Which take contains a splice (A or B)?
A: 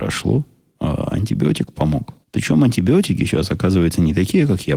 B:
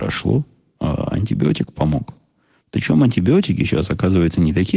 A